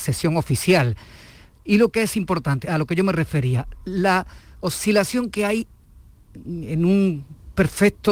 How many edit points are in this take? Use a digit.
1